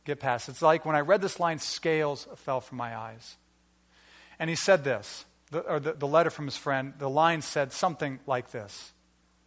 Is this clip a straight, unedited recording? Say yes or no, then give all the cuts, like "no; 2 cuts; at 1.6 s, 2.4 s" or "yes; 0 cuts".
no; 1 cut; at 5.9 s